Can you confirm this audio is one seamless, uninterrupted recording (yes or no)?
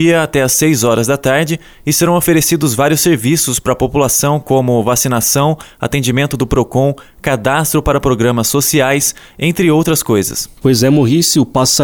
no